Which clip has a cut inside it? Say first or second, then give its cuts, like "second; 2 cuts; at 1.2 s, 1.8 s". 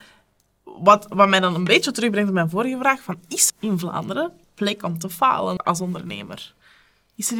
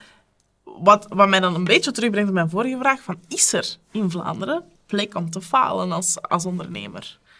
first; 2 cuts; at 3.5 s, 5.6 s